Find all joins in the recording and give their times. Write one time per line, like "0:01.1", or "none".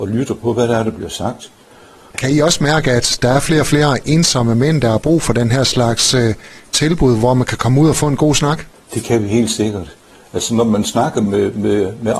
0:02.1

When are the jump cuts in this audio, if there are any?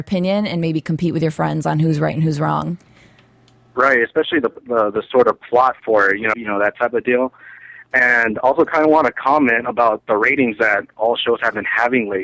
0:06.3

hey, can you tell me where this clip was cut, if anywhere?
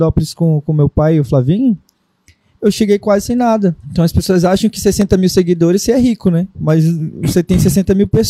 0:03.8
0:06.5

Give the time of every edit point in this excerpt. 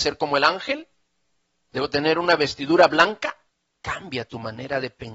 0:03.8

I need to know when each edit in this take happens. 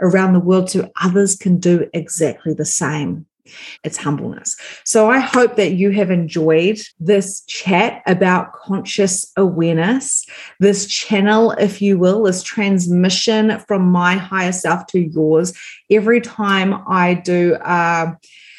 0:03.8
0:06.9

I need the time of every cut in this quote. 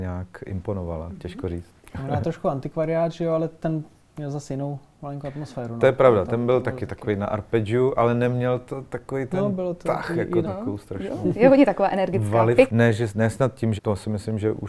0:10.4
0:12.7
0:13.8

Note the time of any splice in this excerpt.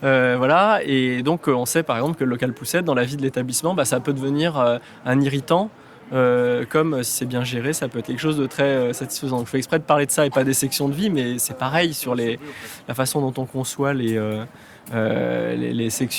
none

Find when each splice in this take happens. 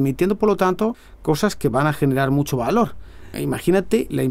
0:03.3

